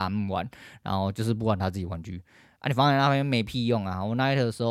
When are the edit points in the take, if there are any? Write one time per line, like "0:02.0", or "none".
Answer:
none